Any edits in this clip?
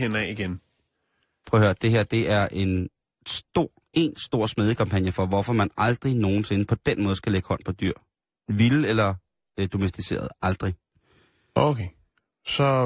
no; 0 cuts

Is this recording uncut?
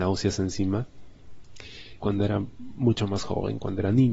no; 1 cut; at 2.0 s

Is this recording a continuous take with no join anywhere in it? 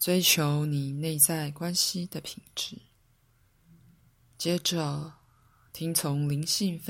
yes; 0 cuts

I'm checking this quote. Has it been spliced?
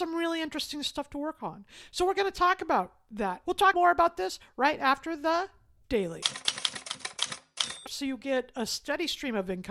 yes; 2 cuts; at 3.4 s, 7.8 s

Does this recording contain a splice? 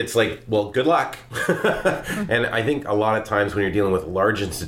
yes; 1 cut; at 2.3 s

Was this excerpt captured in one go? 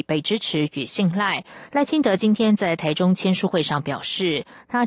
no; 1 cut; at 1.7 s

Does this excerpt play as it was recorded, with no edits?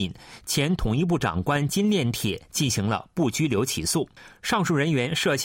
yes; 0 cuts

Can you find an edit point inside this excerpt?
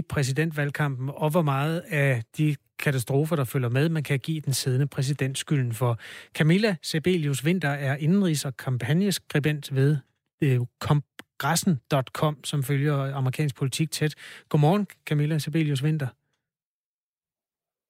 no; 0 cuts

